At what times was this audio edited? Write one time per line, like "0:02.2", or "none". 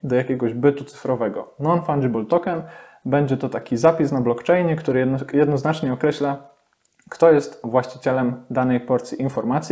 none